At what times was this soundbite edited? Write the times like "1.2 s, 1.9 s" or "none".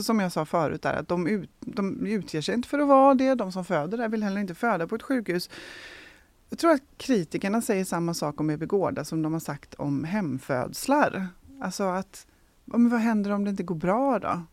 none